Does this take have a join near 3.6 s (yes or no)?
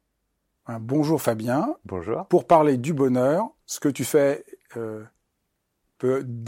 yes